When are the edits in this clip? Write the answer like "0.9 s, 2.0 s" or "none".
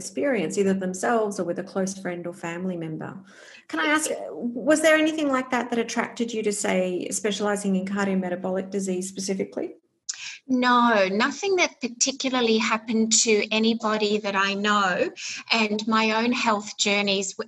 none